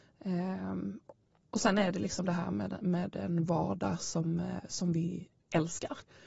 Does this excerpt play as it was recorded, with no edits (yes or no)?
yes